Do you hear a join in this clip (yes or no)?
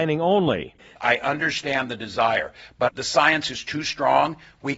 yes